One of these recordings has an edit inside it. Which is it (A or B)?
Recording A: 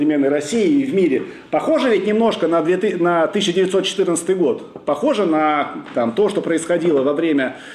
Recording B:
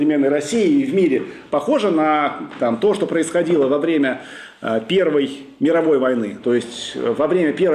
B